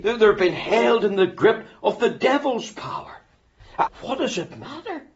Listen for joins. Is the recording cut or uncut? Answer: cut